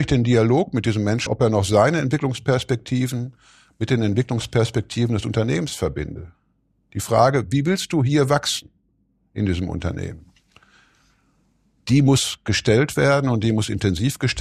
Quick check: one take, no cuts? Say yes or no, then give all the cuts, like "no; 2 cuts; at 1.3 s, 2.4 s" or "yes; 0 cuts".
no; 1 cut; at 1.3 s